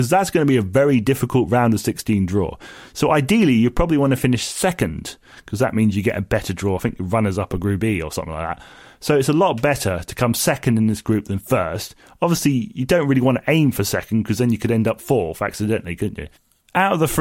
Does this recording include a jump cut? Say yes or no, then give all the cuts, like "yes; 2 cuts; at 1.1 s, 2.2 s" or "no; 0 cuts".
no; 0 cuts